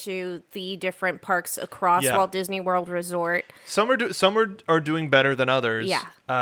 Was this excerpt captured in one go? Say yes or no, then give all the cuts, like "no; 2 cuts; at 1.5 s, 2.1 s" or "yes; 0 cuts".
yes; 0 cuts